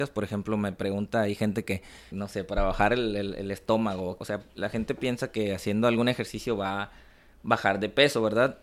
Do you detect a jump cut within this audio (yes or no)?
yes